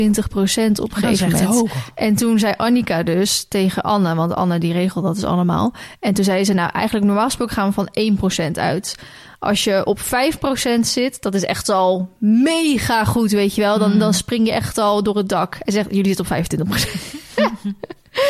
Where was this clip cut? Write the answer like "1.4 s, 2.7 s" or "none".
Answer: none